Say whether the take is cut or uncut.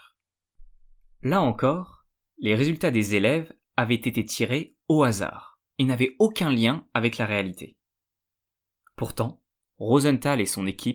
cut